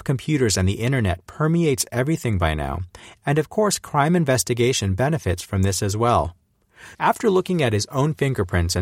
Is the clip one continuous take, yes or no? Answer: no